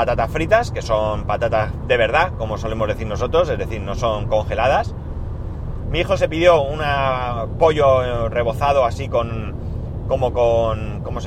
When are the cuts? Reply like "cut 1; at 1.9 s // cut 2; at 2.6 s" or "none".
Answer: cut 1; at 5.8 s